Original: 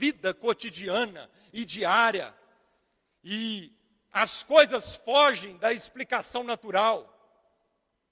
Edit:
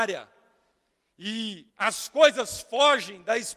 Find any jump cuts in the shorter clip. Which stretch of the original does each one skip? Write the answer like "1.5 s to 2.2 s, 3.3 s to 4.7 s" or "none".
3.8 s to 4.0 s